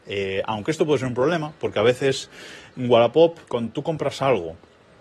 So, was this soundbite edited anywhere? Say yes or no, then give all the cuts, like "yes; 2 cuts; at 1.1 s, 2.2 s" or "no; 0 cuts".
yes; 1 cut; at 3.4 s